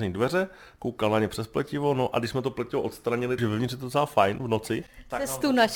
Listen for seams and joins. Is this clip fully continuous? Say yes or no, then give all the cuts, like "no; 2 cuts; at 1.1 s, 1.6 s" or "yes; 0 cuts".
no; 1 cut; at 3.4 s